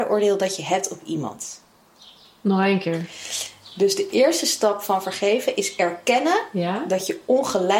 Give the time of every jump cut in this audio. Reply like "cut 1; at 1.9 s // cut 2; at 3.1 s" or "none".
none